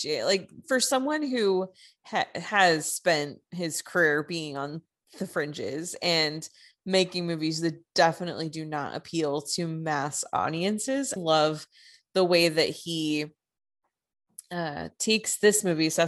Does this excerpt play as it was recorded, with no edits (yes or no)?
no